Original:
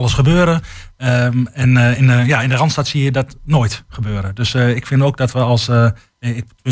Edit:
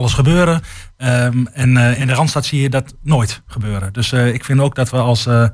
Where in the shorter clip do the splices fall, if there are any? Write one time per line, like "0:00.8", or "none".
0:02.0